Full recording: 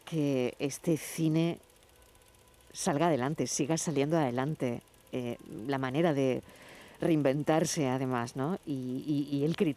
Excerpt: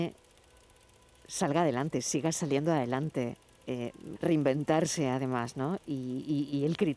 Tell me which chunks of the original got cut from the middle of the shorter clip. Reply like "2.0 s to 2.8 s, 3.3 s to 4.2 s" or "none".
5.6 s to 6.9 s